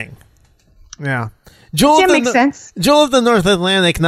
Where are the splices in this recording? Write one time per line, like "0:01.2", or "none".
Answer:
0:01.0

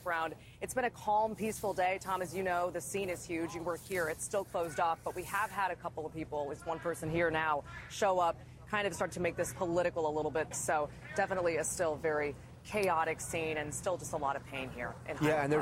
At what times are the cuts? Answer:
0:10.5

